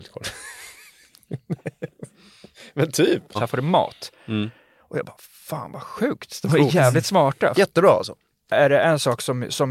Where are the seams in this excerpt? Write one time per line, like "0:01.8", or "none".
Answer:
0:03.3
0:07.5